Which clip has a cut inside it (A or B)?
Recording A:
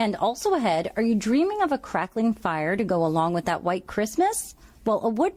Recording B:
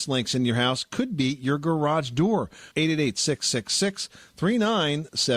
B